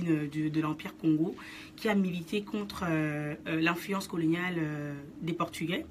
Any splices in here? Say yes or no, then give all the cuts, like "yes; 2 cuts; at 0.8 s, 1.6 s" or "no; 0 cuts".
no; 0 cuts